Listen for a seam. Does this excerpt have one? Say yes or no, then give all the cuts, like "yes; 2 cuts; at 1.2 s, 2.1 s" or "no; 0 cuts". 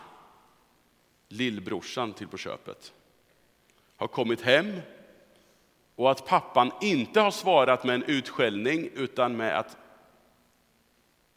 no; 0 cuts